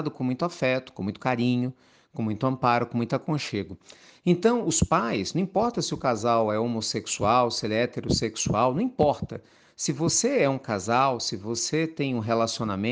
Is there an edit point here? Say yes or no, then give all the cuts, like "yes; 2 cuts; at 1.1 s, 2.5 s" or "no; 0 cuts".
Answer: no; 0 cuts